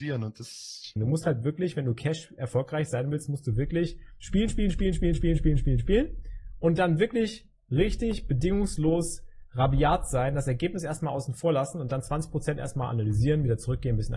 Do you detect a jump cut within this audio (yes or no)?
yes